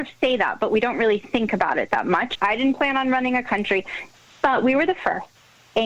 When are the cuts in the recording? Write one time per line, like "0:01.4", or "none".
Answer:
0:02.3
0:04.3